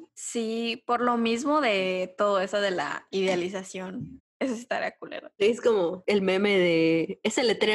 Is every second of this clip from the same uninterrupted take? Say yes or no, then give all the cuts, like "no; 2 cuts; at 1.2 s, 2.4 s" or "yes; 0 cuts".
no; 2 cuts; at 4.2 s, 5.4 s